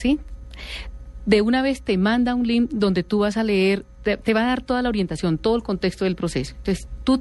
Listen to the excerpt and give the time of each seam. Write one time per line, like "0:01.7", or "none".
none